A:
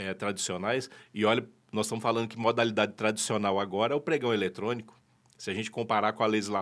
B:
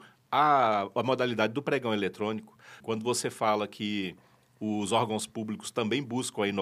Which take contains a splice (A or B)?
B